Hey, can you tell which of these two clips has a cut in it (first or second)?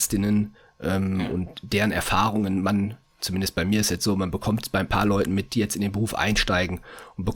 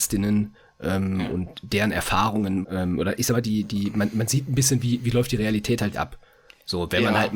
second